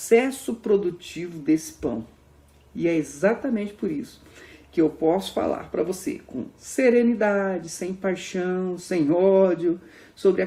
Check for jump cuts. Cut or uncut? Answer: uncut